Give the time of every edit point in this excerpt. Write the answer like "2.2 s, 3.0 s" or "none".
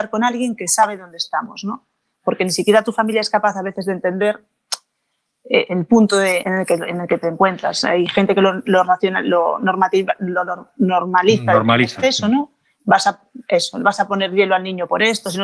6.4 s